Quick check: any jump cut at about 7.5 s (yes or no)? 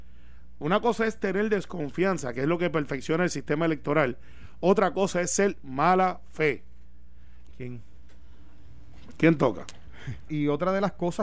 yes